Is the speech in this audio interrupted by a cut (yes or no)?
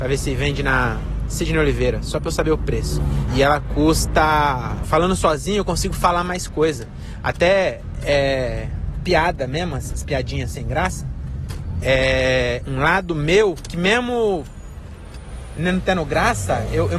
yes